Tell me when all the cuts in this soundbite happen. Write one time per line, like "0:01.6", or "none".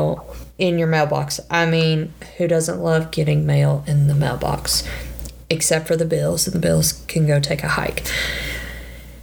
none